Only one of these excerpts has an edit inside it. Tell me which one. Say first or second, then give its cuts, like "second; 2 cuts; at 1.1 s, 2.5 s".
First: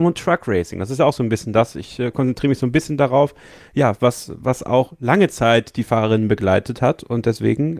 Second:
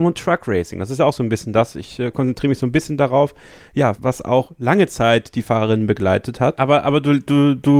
second; 2 cuts; at 4.0 s, 6.5 s